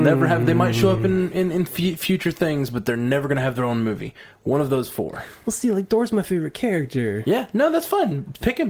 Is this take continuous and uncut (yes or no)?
yes